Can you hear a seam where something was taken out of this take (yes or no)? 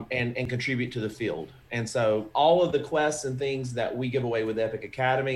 no